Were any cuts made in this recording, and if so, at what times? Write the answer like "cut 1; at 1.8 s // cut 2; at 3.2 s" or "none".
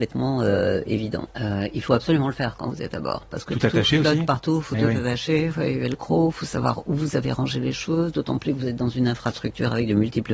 cut 1; at 1.3 s